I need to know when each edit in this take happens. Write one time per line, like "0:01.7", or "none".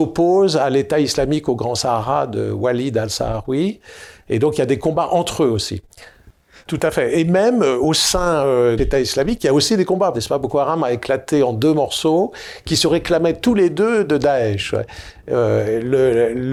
0:06.7
0:08.8
0:10.1